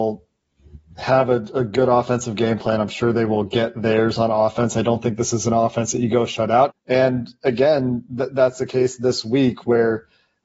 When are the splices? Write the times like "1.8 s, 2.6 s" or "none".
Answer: 6.7 s